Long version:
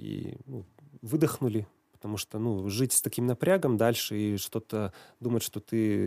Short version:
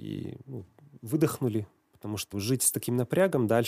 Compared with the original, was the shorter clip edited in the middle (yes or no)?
yes